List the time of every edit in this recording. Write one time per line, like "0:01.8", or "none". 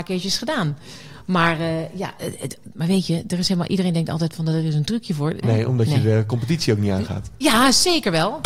0:05.4